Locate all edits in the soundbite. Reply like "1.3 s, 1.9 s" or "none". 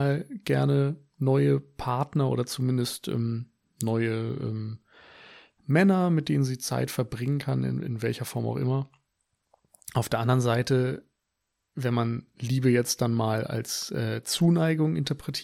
none